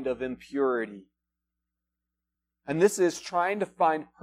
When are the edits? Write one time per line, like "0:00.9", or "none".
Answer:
none